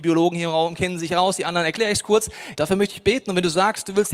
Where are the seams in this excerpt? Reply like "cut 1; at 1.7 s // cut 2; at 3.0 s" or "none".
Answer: cut 1; at 2.6 s

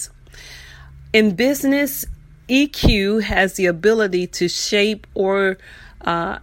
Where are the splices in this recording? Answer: none

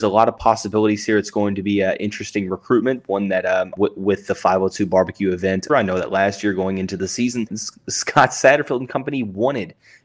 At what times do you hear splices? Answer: cut 1; at 3.8 s // cut 2; at 5.7 s // cut 3; at 7.5 s

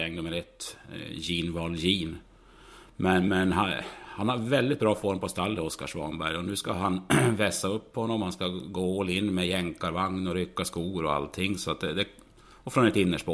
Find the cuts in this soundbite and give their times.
none

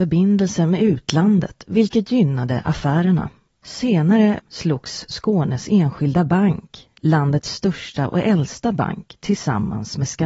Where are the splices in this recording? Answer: cut 1; at 4.4 s

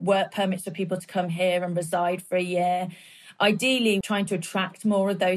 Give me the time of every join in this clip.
cut 1; at 4.0 s

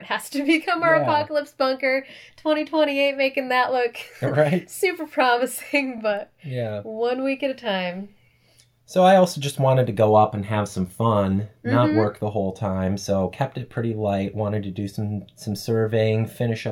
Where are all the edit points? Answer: none

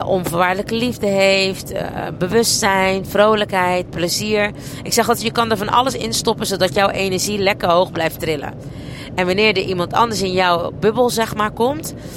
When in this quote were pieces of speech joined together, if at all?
none

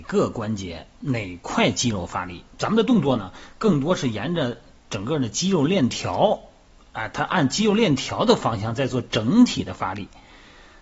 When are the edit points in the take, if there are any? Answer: none

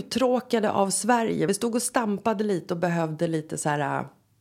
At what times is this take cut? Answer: none

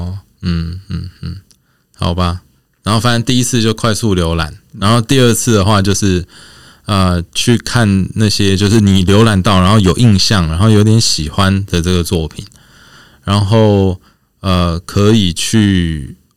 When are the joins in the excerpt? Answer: none

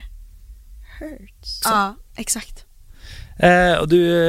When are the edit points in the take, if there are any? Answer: cut 1; at 1.6 s

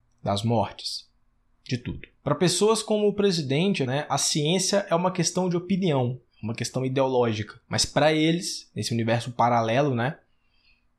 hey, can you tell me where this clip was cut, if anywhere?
cut 1; at 3.9 s

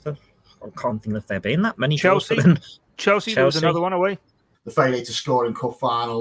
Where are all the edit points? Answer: cut 1; at 4.5 s

